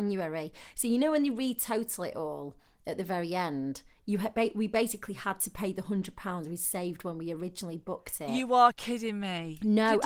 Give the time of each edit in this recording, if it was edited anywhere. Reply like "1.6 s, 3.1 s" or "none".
none